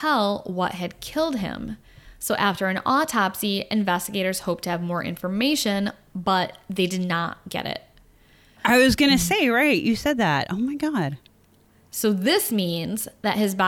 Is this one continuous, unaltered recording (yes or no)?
no